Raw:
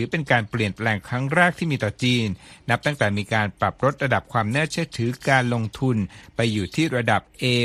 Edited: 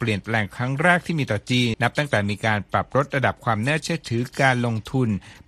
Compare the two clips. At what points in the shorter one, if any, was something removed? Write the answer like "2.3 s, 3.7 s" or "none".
1.7 s